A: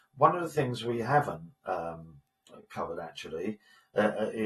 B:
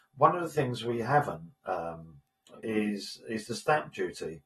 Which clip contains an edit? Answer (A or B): B